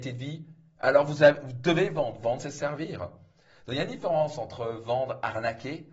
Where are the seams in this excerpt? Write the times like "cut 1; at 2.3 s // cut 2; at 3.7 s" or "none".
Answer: none